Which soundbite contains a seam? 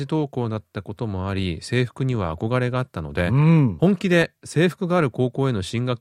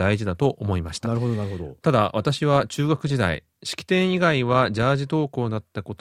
second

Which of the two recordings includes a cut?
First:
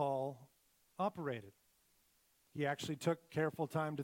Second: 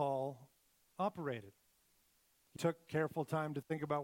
second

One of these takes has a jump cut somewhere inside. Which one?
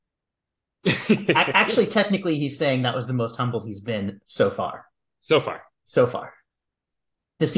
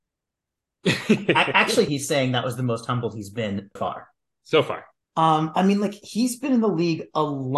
second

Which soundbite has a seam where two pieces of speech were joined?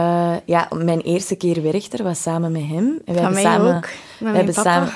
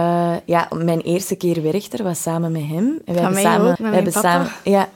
second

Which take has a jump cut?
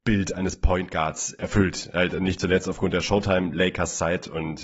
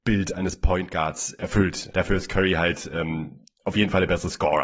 second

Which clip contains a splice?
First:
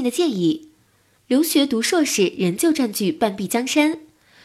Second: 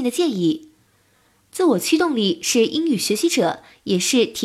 first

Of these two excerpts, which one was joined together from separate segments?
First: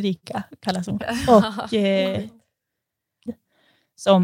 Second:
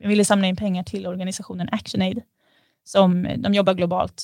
first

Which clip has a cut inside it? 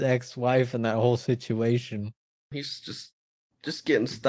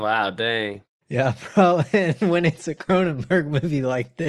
first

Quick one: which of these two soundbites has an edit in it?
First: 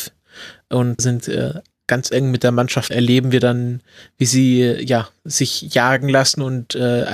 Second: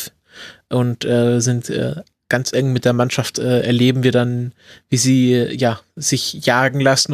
first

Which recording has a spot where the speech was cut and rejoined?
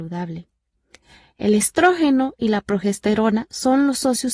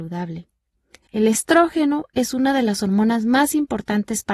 second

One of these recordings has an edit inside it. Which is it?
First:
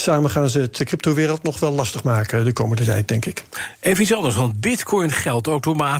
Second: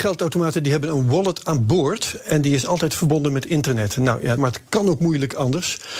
second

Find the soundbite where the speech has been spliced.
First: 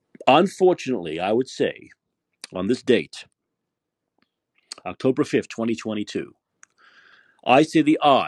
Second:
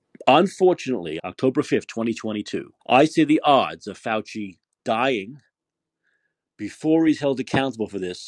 second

